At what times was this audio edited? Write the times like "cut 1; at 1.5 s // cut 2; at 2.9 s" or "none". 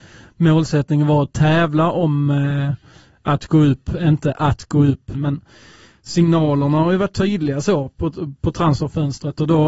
cut 1; at 5.1 s